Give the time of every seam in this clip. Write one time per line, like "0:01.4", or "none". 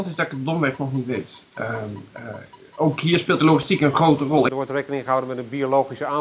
0:04.5